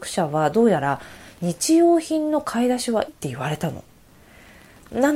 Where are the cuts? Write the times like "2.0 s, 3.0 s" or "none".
3.1 s

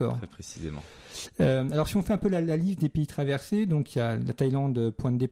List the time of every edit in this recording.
none

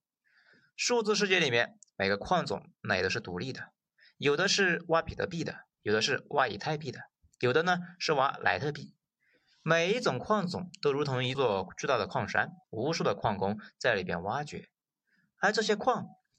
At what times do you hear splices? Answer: 11.3 s, 12.6 s

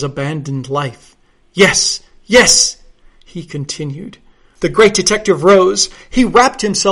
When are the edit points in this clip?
4.6 s

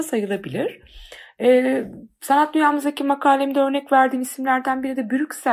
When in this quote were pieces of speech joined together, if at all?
none

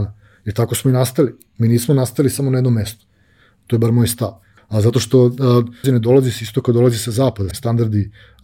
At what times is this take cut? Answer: 4.6 s, 5.8 s, 7.5 s

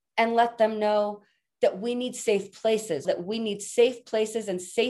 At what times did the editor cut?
3.0 s

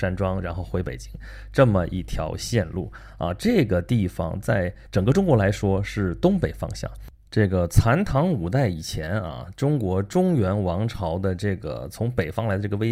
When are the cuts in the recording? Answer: none

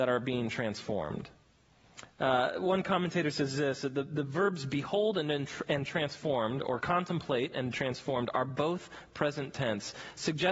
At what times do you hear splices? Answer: none

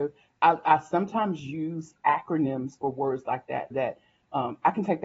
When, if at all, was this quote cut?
2.0 s, 3.7 s

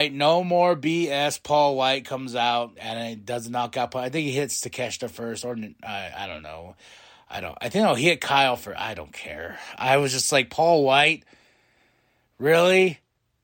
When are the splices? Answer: 2.8 s

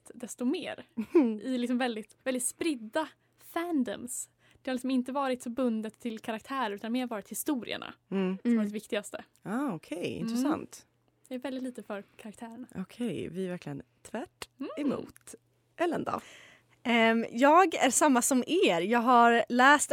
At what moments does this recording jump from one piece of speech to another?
2.2 s

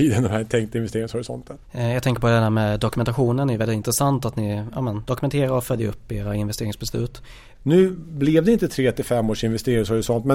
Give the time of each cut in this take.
1.6 s, 7.5 s

